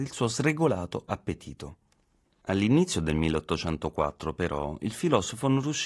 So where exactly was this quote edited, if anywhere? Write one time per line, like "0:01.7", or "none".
none